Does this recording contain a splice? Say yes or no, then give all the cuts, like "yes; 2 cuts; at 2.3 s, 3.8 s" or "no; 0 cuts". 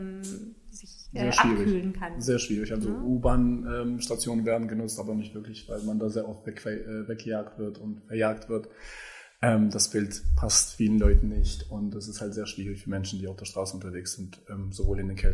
no; 0 cuts